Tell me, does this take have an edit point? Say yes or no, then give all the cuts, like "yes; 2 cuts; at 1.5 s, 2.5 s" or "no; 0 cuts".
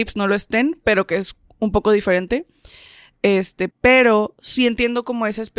yes; 1 cut; at 3.7 s